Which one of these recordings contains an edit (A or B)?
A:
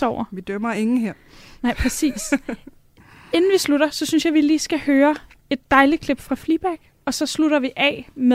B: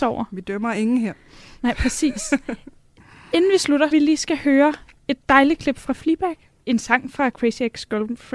B